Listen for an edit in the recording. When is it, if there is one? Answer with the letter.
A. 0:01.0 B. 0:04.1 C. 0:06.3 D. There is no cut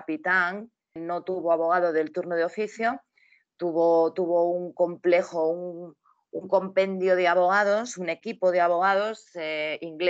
A